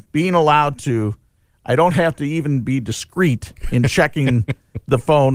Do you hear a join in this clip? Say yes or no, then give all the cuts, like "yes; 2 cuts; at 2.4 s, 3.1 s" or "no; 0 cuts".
no; 0 cuts